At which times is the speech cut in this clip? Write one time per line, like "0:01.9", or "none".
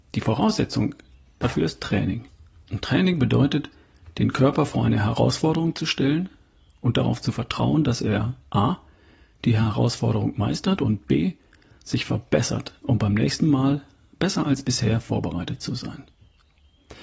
none

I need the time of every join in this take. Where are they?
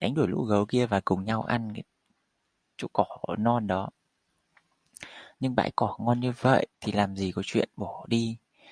0:05.3
0:06.7

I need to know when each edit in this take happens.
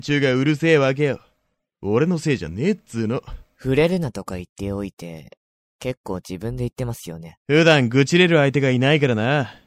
none

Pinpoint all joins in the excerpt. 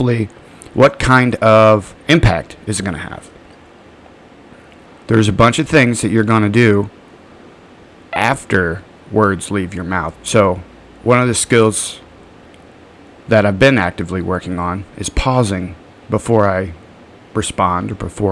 0:02.0
0:04.9
0:10.1

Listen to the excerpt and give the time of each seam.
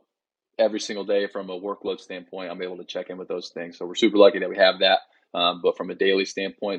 none

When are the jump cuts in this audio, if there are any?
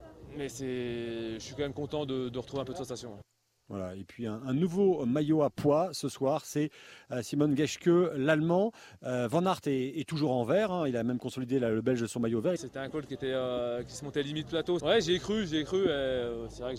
0:12.6
0:14.8

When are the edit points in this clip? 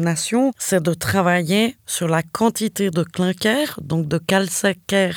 none

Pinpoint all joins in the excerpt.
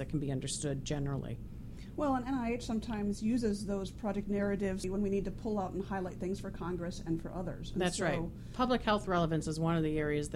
none

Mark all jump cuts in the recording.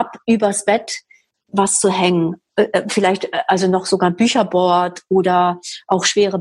none

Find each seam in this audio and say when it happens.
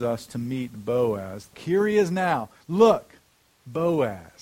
0:01.5

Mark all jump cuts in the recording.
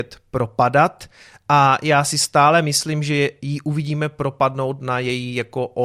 none

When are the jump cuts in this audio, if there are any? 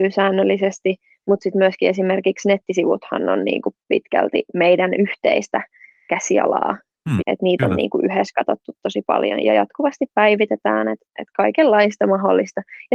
0:07.2
0:09.4

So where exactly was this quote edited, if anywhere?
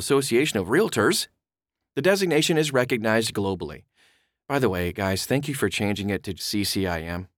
0:06.4

